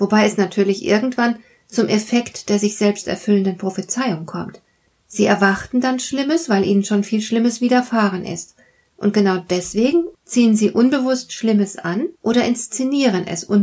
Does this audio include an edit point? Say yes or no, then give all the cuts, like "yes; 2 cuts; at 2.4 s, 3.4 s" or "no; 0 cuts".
yes; 2 cuts; at 10.1 s, 12.1 s